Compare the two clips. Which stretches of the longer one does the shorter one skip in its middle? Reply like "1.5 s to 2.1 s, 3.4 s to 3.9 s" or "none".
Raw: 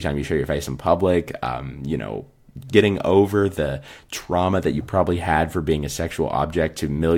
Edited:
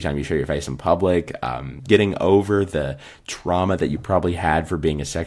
1.8 s to 2.6 s